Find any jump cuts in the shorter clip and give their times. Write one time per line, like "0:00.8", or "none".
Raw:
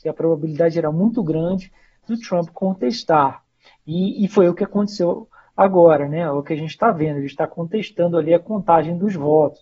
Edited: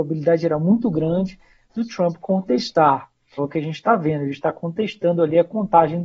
0:03.4